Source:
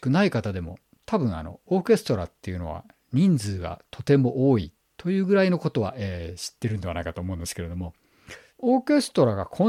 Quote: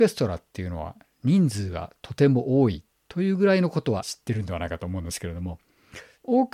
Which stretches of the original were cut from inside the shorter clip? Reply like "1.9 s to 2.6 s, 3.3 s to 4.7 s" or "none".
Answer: 5.9 s to 6.4 s